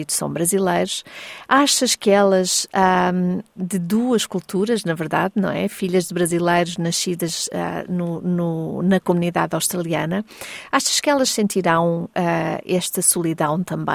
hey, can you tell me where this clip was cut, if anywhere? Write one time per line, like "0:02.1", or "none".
0:03.6